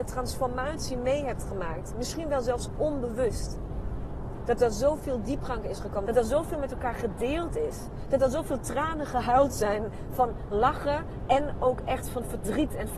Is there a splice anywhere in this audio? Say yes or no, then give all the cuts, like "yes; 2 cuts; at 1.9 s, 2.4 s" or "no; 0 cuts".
yes; 1 cut; at 6.1 s